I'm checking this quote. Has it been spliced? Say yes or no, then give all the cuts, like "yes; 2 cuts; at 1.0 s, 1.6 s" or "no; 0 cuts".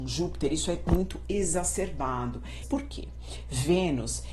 yes; 1 cut; at 2.6 s